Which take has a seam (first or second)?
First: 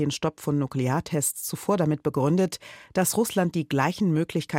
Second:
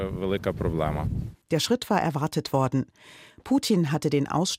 second